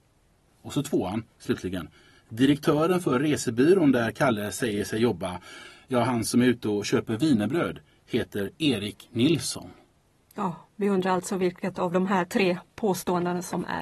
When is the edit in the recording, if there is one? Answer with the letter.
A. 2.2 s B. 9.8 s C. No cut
C